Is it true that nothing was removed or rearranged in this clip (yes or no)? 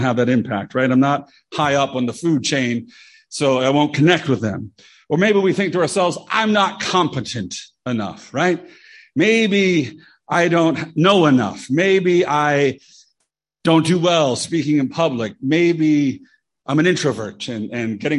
yes